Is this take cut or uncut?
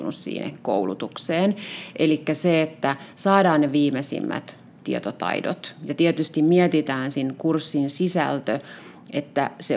uncut